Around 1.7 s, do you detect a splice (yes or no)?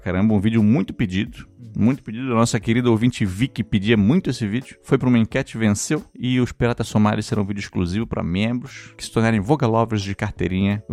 no